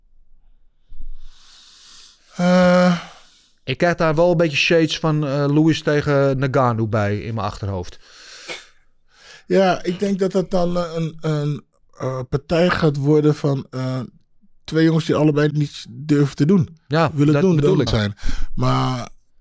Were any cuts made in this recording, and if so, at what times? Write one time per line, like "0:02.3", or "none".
0:15.5
0:17.9